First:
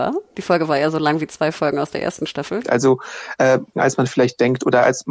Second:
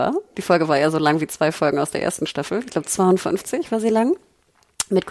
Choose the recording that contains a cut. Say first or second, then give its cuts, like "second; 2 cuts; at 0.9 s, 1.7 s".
first; 2 cuts; at 2.6 s, 3.7 s